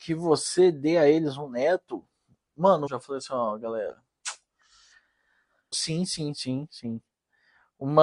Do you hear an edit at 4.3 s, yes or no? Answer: no